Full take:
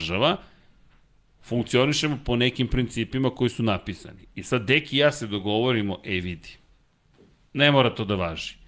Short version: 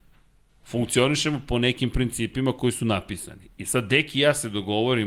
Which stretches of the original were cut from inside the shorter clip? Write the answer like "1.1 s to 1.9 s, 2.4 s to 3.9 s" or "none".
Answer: none